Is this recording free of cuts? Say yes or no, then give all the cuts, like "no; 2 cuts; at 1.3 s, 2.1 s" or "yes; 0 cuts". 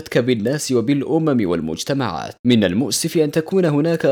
no; 1 cut; at 2.4 s